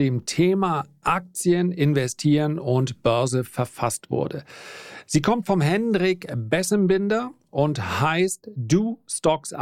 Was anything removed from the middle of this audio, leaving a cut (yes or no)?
no